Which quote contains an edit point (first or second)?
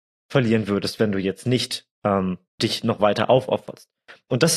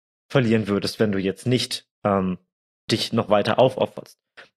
first